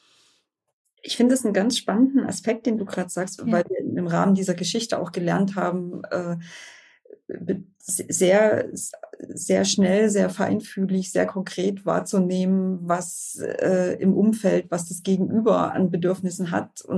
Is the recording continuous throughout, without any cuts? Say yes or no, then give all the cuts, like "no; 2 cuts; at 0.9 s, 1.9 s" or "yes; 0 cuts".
no; 1 cut; at 3.4 s